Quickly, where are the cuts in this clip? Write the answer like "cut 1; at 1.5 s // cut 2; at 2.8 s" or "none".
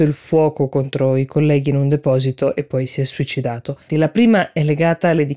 cut 1; at 3.9 s